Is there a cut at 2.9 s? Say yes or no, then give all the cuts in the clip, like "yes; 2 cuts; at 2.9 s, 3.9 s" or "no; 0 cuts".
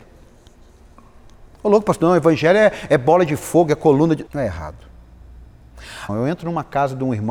no; 2 cuts; at 4.3 s, 6.1 s